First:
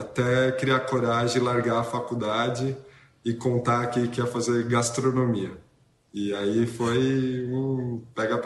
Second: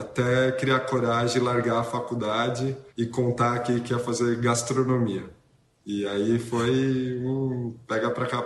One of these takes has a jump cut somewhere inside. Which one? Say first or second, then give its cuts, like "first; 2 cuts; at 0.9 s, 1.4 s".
second; 1 cut; at 2.9 s